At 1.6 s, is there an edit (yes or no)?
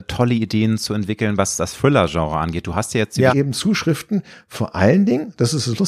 no